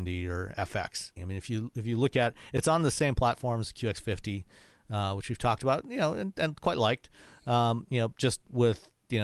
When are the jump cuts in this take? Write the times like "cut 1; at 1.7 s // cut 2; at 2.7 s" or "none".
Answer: cut 1; at 1.2 s